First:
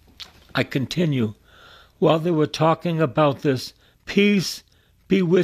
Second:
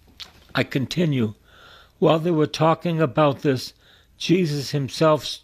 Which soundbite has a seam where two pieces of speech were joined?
first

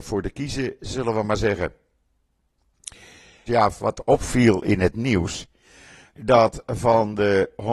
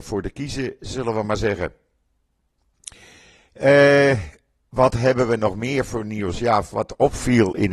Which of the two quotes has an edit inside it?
first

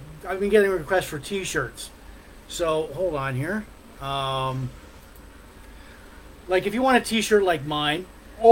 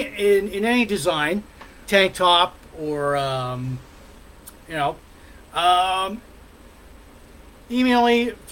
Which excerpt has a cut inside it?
second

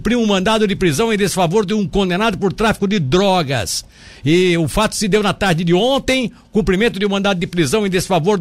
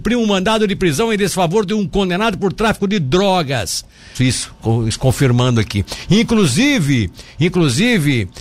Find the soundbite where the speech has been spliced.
second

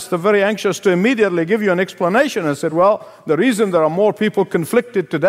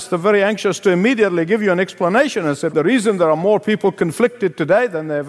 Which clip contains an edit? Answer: second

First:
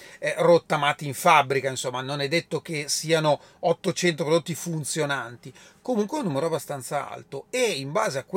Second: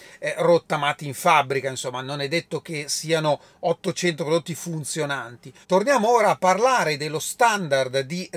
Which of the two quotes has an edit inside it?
second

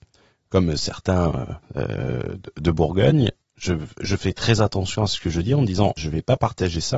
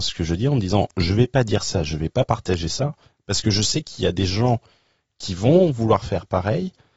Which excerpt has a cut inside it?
first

